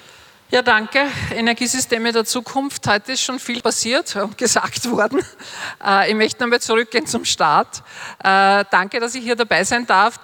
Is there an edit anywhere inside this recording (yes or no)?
no